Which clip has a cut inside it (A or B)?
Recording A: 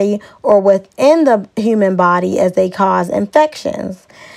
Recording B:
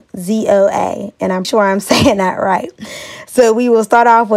B